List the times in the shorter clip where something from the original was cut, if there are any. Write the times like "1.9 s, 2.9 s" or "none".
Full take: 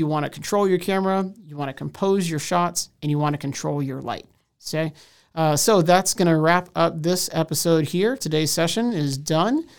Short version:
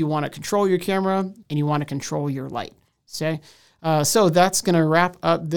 1.4 s